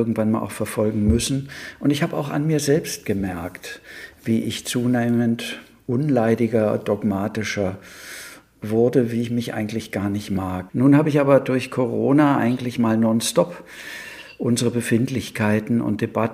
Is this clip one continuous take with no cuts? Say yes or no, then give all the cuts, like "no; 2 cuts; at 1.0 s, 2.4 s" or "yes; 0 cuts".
no; 1 cut; at 10.7 s